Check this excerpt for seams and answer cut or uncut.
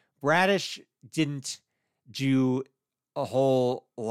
uncut